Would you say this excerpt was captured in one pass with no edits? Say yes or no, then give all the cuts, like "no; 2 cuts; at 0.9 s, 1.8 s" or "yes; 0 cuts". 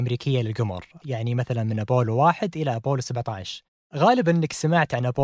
no; 1 cut; at 1.0 s